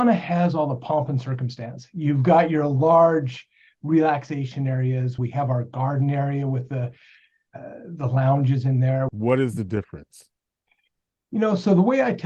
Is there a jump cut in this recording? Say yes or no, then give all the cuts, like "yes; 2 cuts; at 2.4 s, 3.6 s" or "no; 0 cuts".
yes; 2 cuts; at 5.2 s, 9.1 s